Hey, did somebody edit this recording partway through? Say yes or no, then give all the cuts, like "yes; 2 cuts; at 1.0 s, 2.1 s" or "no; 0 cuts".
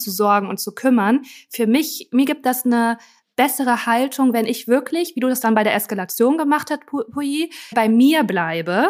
yes; 1 cut; at 7.7 s